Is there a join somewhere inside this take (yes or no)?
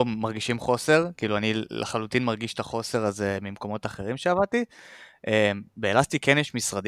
no